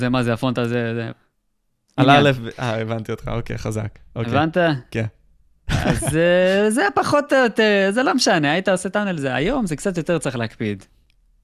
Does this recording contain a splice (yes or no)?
yes